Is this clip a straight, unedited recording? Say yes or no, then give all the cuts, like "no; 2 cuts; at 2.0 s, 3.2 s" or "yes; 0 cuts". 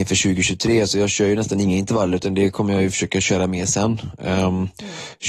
yes; 0 cuts